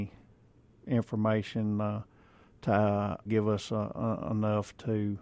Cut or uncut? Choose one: cut